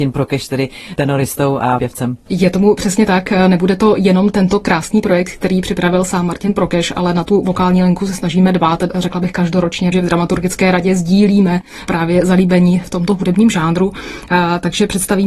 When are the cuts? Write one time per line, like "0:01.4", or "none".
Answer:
0:09.9